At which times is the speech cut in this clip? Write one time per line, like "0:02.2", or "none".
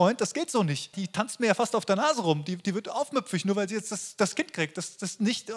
0:00.9